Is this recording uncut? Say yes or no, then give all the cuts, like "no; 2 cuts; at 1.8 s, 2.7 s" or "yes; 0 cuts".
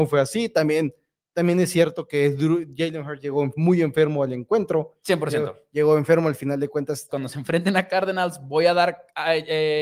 no; 1 cut; at 7.1 s